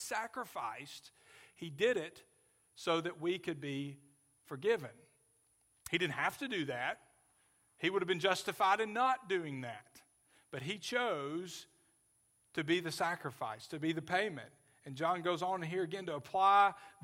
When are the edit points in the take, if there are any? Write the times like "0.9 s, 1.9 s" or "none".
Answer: none